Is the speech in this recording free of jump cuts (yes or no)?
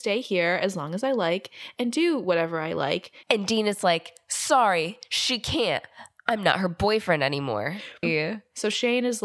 no